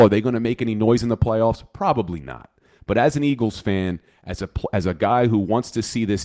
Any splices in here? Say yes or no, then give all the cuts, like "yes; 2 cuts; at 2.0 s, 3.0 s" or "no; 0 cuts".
no; 0 cuts